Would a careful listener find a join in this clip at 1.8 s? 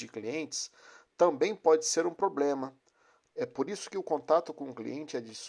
no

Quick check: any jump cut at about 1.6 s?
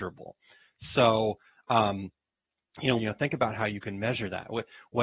no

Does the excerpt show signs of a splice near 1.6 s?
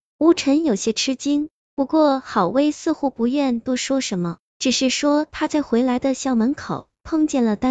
no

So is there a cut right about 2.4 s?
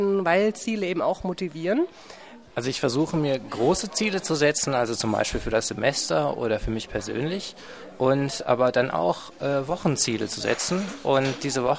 yes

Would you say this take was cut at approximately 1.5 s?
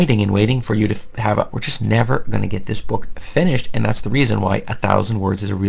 yes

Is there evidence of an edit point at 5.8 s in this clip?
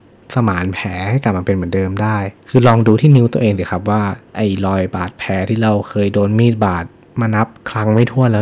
no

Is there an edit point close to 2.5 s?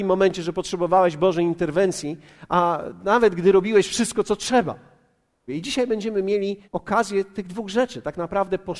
no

